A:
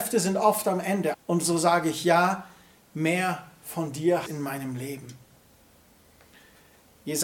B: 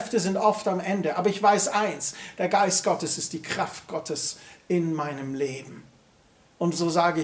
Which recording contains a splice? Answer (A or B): A